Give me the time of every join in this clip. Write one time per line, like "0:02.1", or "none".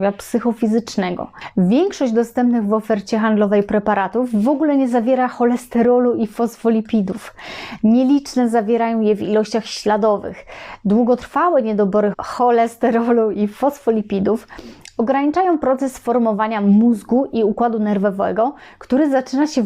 0:12.1